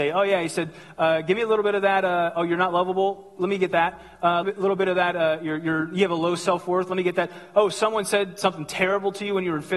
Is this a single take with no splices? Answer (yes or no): no